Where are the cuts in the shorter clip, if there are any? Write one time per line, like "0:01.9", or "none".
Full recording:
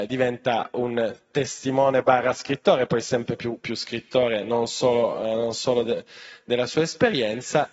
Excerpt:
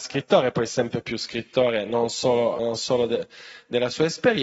0:01.0
0:02.6